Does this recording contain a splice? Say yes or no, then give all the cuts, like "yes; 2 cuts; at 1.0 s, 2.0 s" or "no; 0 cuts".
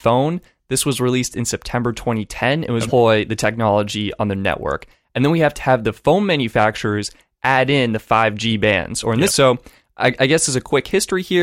yes; 2 cuts; at 2.9 s, 9.3 s